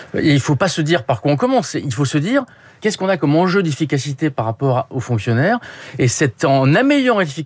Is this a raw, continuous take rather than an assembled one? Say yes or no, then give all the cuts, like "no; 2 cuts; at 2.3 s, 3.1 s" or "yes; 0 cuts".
no; 1 cut; at 2.8 s